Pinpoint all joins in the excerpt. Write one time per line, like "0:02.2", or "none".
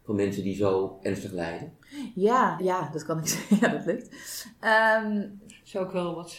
0:02.6